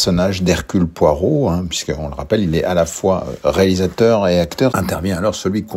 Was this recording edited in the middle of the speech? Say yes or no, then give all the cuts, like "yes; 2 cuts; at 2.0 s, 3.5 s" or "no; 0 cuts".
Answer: yes; 1 cut; at 4.7 s